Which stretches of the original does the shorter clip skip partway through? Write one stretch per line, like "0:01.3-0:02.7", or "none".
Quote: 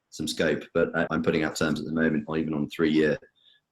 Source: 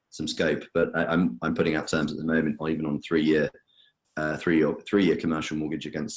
0:01.1-0:01.4